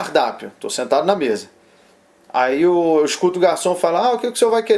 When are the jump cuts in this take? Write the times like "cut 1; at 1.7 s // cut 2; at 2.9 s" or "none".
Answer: none